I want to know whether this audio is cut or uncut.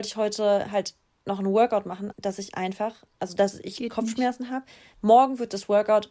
cut